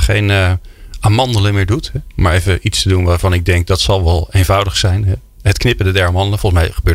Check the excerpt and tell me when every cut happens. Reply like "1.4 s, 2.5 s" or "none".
none